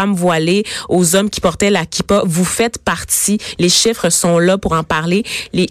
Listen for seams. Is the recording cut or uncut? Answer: cut